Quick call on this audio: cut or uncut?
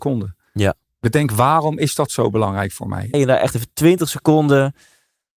cut